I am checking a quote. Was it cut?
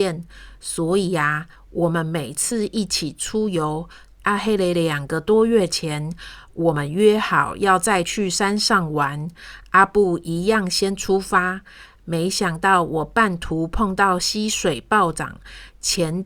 yes; 1 cut; at 4.2 s

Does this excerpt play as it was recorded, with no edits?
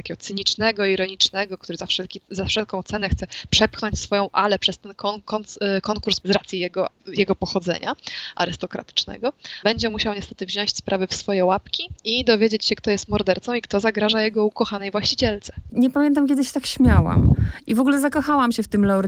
no; 1 cut; at 6.2 s

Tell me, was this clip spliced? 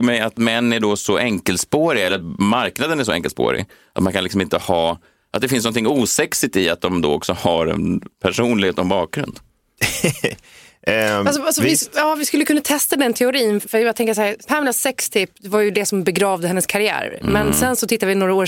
no; 0 cuts

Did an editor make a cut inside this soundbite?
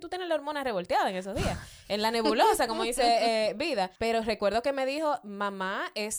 yes; 1 cut; at 4.0 s

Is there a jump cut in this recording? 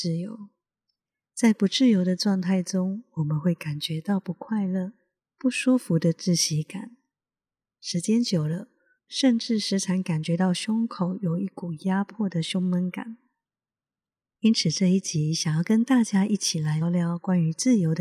yes; 3 cuts; at 9.0 s, 14.3 s, 16.8 s

